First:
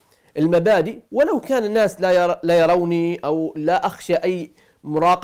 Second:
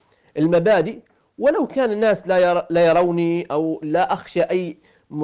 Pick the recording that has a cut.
first; 1 cut; at 1.0 s

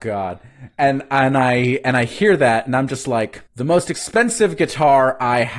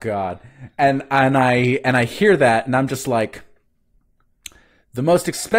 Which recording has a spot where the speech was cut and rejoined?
first; 1 cut; at 3.5 s

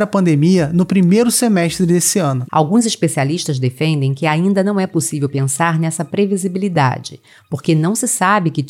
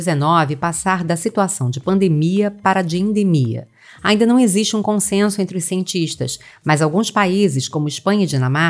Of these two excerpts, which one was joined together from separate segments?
first; 1 cut; at 2.4 s

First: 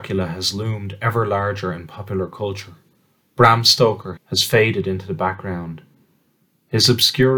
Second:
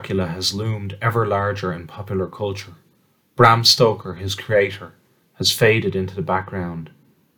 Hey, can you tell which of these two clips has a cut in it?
first; 1 cut; at 4.2 s

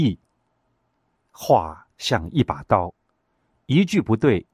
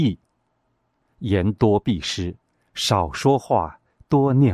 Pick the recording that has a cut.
second; 1 cut; at 1.0 s

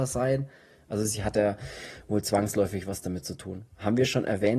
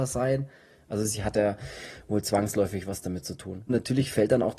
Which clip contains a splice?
second; 1 cut; at 3.7 s

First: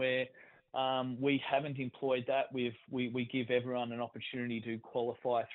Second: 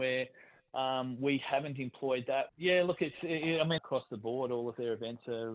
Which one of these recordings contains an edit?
second; 2 cuts; at 2.5 s, 3.8 s

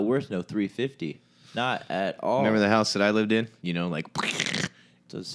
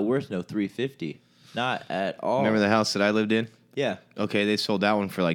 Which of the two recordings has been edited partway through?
first; 1 cut; at 3.6 s

